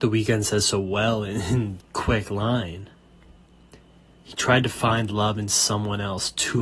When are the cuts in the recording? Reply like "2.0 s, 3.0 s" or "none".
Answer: 1.8 s